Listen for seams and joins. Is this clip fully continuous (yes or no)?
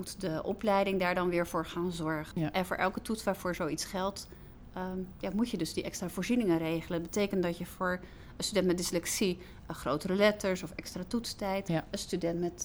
no